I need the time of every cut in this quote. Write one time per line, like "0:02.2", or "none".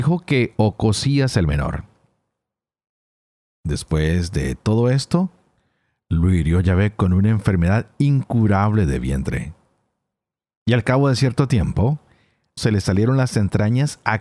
0:12.6

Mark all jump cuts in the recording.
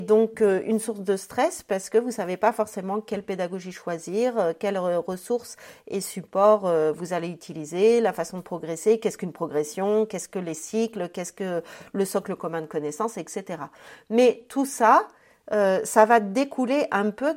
none

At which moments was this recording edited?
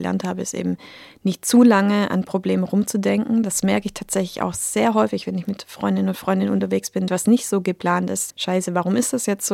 0:07.1
0:08.3

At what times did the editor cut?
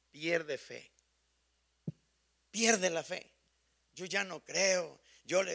none

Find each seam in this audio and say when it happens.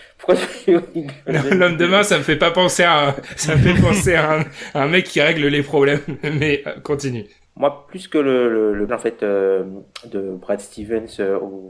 0:07.5
0:08.9

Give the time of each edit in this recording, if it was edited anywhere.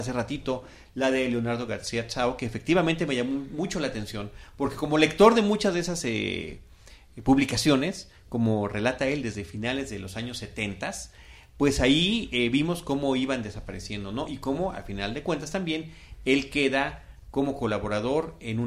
none

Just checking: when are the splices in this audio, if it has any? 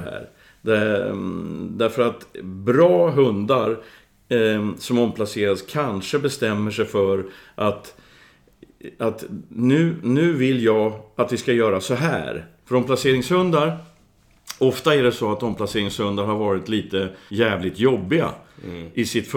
0:12.6
0:17.3

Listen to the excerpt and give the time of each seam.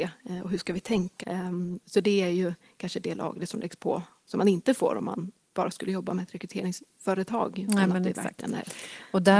0:01.2

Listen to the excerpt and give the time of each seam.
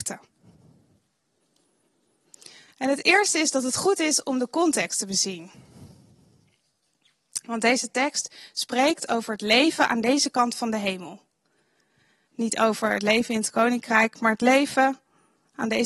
0:12.3

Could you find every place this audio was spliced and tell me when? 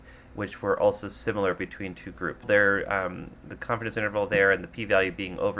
0:02.4

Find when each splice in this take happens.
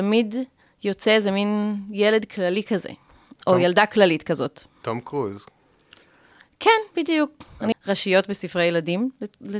0:07.7

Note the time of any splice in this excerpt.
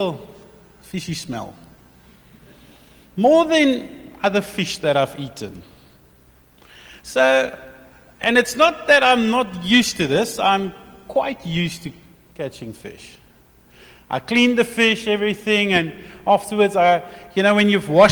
none

